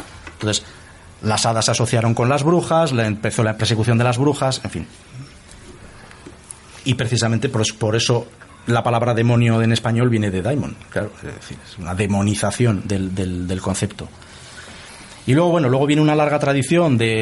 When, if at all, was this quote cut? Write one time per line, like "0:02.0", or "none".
none